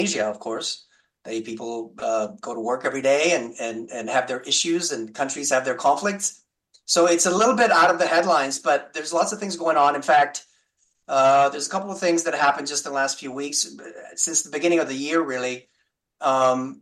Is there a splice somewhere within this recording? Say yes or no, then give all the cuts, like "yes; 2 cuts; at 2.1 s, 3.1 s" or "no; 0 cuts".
no; 0 cuts